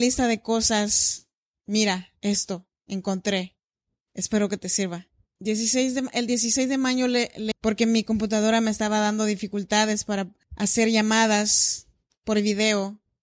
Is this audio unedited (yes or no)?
no